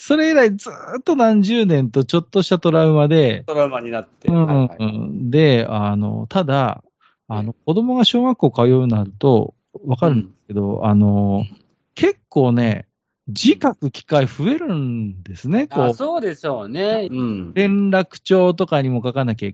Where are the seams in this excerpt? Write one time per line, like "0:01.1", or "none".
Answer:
0:17.1